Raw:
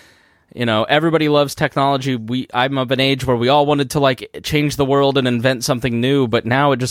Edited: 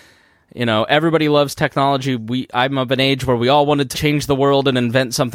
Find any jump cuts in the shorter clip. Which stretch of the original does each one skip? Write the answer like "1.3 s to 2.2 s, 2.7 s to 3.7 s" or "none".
3.9 s to 4.4 s